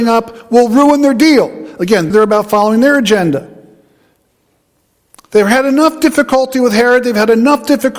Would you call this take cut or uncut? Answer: cut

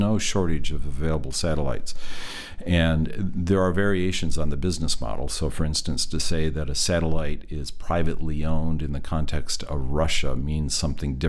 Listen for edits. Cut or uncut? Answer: uncut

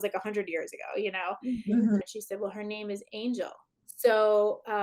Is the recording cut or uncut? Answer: cut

